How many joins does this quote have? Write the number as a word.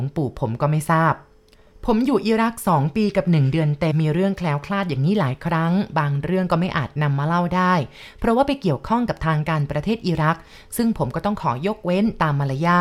one